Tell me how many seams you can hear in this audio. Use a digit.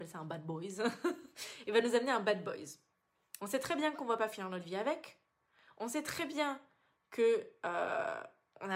1